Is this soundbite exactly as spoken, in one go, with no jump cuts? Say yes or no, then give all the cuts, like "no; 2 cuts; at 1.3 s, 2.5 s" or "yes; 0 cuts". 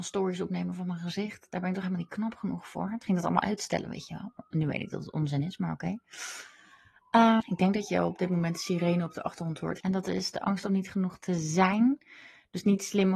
no; 2 cuts; at 7.4 s, 9.8 s